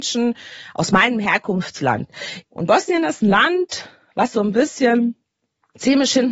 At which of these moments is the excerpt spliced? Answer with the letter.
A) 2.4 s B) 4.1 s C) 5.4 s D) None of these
A